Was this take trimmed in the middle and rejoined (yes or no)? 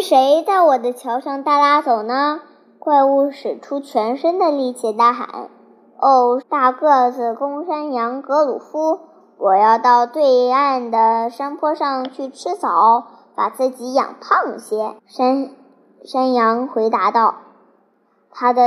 yes